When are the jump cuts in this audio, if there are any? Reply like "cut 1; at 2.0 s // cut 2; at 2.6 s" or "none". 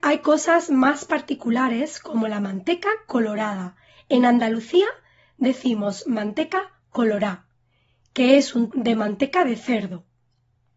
cut 1; at 8.7 s

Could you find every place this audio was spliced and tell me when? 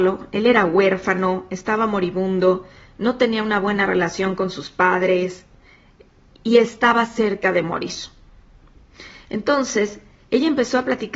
none

